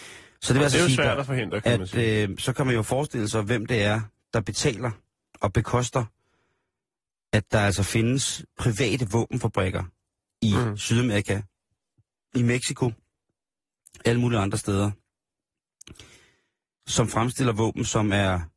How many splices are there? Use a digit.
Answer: 0